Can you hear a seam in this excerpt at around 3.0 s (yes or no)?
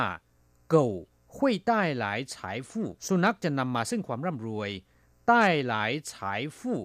yes